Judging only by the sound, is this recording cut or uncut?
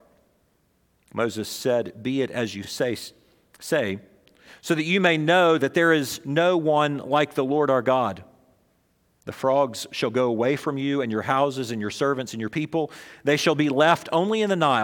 uncut